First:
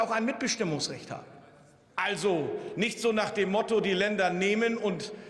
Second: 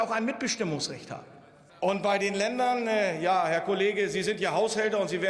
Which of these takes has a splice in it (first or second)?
second